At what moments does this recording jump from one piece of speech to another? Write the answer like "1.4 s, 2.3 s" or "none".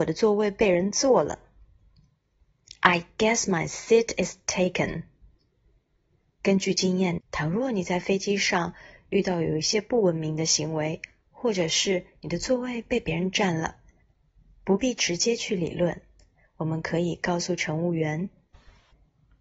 7.2 s